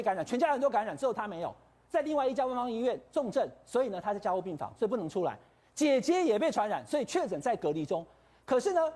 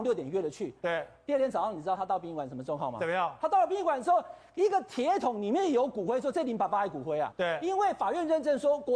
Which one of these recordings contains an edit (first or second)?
second